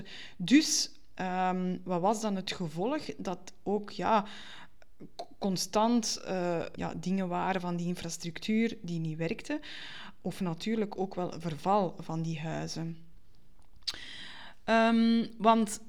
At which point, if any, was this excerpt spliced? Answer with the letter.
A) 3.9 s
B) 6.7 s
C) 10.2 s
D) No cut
B